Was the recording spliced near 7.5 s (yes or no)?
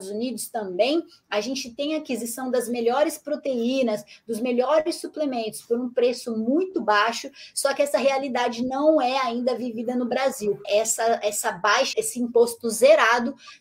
no